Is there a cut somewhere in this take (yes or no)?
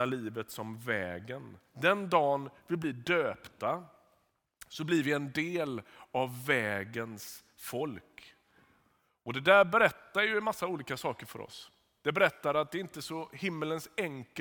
no